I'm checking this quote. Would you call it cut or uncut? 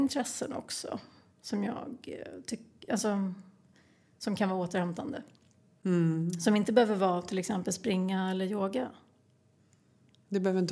uncut